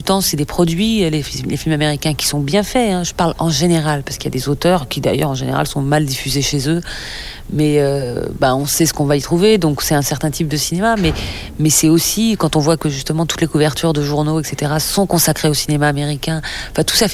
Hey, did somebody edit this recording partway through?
no; 0 cuts

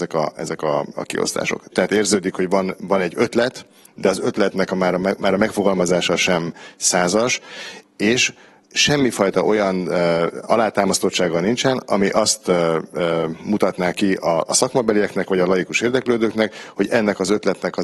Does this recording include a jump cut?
yes; 1 cut; at 1.7 s

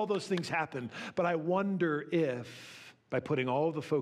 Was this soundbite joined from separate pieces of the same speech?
yes; 1 cut; at 3.0 s

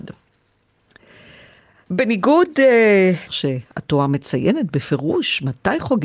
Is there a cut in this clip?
yes; 2 cuts; at 1.9 s, 3.3 s

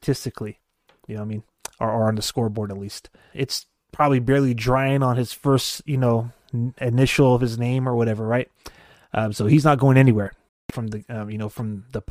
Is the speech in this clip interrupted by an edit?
yes; 2 cuts; at 3.3 s, 10.5 s

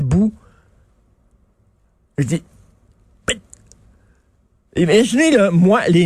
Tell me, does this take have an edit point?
no; 0 cuts

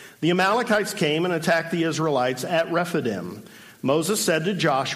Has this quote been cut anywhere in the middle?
no; 0 cuts

